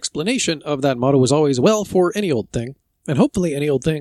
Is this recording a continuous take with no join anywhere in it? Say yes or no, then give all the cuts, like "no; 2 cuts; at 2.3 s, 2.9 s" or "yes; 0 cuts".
yes; 0 cuts